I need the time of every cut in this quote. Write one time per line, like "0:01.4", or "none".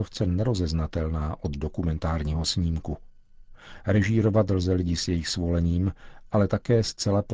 none